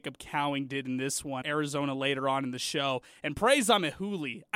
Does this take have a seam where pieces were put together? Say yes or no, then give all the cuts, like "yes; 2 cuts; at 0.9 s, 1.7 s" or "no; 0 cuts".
yes; 1 cut; at 1.4 s